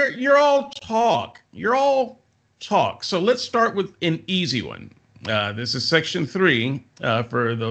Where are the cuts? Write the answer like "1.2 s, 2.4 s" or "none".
none